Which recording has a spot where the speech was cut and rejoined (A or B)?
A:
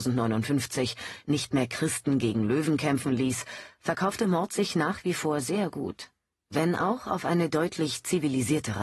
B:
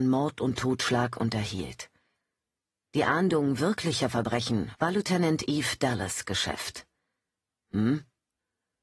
B